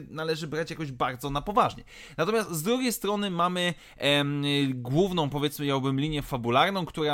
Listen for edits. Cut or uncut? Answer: uncut